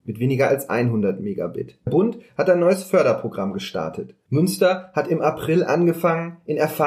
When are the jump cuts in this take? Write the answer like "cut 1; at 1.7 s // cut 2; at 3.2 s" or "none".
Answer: cut 1; at 4.3 s